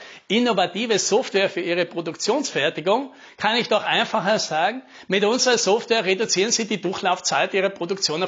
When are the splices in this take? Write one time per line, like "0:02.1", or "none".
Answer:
none